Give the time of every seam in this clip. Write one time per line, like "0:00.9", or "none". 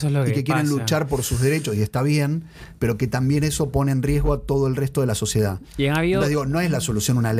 none